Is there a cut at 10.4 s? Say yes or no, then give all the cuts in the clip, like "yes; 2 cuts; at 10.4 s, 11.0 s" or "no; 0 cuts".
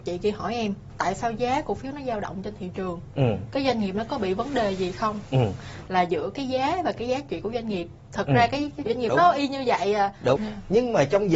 yes; 3 cuts; at 5.9 s, 9.1 s, 10.4 s